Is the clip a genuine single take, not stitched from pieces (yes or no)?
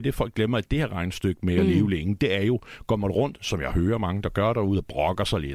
yes